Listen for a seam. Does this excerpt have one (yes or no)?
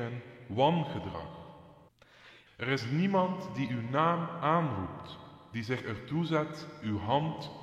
yes